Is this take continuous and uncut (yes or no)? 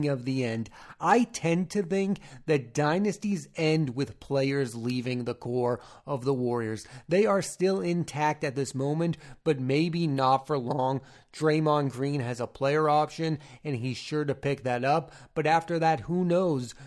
yes